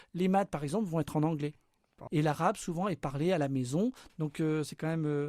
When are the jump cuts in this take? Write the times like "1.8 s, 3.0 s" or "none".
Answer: 2.1 s, 4.1 s